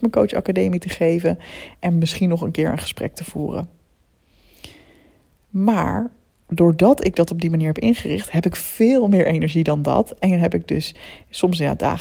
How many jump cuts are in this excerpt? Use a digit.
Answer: 0